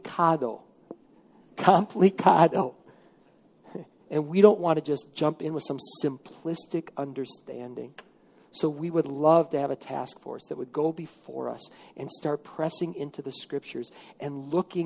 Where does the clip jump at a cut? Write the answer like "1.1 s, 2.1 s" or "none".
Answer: 4.0 s